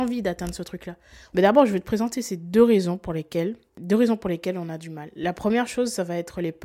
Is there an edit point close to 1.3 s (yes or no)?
yes